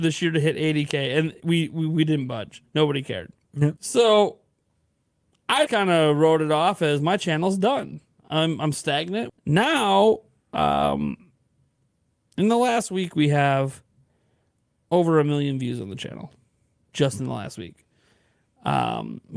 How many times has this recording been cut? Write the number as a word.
three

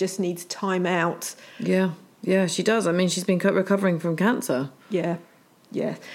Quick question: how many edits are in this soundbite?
one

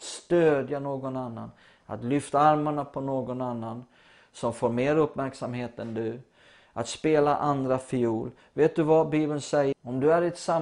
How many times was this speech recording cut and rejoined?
one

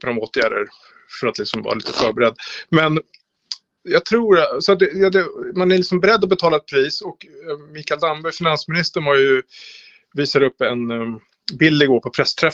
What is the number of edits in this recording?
zero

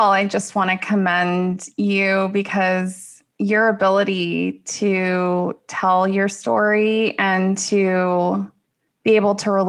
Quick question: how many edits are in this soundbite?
zero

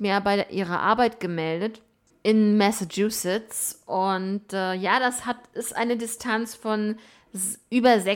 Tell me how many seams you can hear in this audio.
one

